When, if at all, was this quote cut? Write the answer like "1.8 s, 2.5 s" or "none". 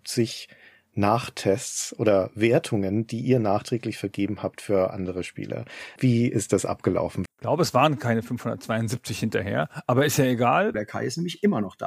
6.0 s, 7.3 s, 10.7 s